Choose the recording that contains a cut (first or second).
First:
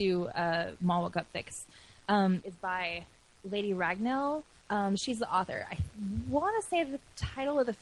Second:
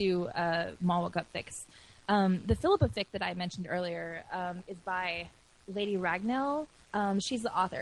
first